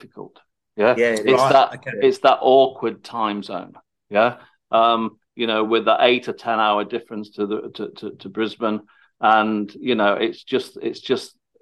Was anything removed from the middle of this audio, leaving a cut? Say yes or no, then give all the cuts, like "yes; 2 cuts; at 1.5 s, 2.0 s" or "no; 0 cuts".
no; 0 cuts